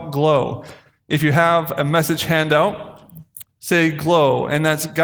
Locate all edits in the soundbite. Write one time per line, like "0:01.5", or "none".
0:03.5